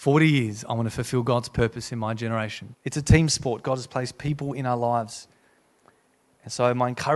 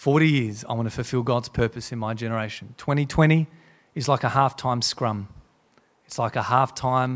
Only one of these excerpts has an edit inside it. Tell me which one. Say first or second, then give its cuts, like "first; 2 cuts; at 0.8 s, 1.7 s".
first; 1 cut; at 2.7 s